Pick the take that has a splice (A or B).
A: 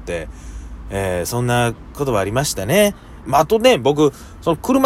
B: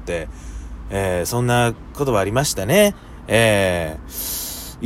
A